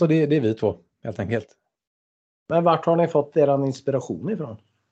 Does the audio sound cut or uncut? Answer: uncut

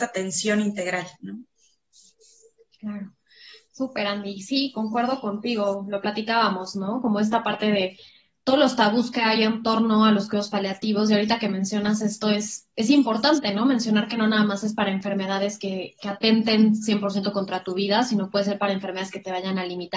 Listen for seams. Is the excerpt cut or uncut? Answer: uncut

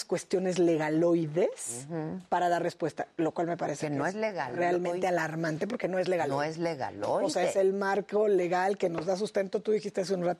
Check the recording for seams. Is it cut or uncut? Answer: uncut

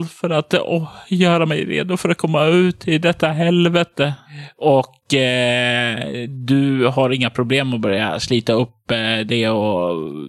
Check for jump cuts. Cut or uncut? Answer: uncut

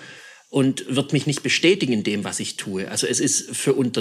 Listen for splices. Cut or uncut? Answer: uncut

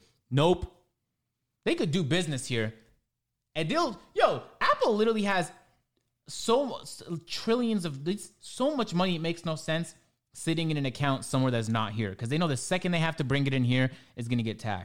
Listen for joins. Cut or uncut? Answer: uncut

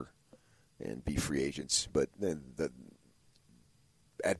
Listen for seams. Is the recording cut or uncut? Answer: uncut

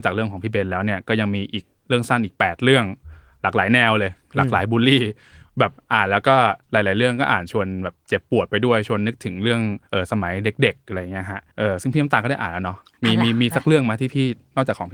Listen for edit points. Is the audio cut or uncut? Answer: cut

